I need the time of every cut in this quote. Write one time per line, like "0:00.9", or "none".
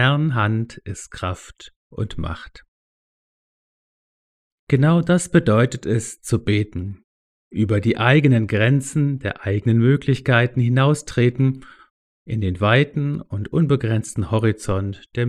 none